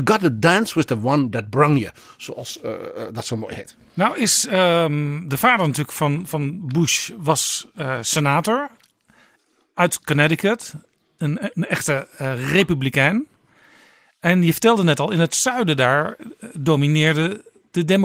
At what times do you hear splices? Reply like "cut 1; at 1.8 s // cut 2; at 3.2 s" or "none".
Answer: none